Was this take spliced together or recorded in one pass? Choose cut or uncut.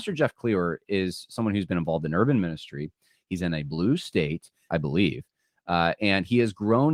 cut